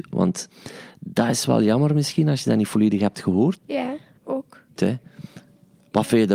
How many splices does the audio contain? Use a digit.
2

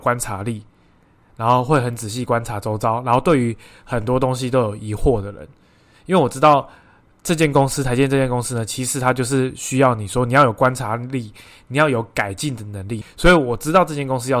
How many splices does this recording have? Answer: 1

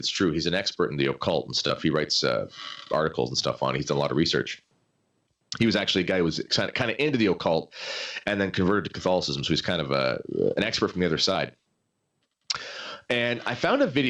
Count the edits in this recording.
0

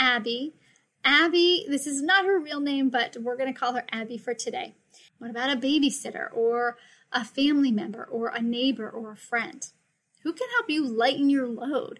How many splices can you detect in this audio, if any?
1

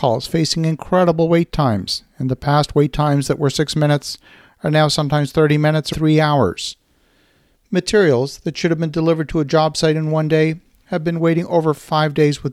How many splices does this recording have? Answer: 1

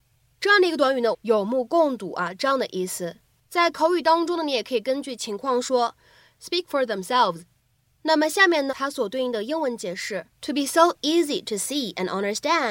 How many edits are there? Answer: 3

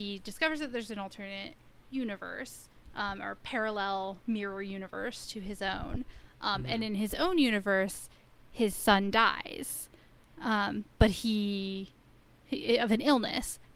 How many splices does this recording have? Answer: 0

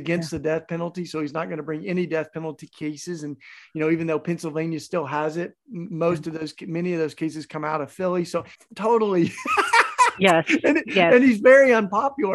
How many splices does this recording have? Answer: 1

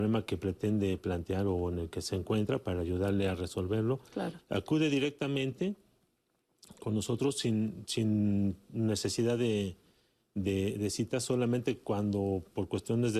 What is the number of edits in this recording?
1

